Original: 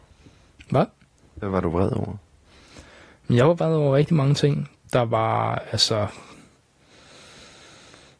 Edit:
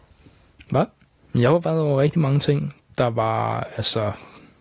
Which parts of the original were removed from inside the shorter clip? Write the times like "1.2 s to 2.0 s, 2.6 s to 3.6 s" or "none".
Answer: 1.3 s to 3.2 s